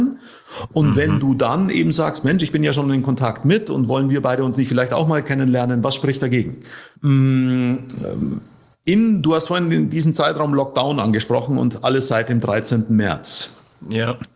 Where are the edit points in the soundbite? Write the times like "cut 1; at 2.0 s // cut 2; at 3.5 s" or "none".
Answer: cut 1; at 7.0 s